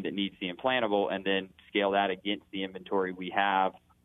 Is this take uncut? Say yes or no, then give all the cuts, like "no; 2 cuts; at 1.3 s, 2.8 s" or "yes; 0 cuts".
yes; 0 cuts